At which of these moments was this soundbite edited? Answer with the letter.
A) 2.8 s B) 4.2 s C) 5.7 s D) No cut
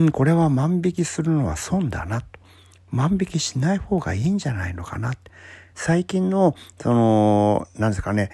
C